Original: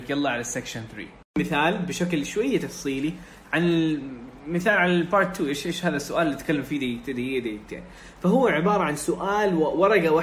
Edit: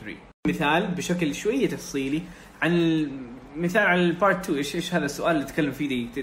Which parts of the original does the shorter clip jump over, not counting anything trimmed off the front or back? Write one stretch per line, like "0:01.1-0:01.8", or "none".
none